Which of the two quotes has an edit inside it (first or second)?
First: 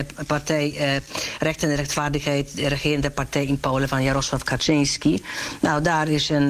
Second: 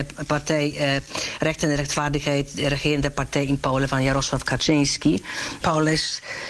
second